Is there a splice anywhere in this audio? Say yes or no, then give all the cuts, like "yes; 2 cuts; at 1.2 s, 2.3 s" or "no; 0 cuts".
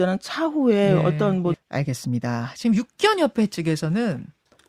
yes; 1 cut; at 1.5 s